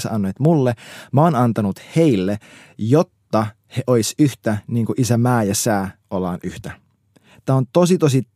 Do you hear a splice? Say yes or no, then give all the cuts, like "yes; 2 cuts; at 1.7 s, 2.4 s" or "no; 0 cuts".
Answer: no; 0 cuts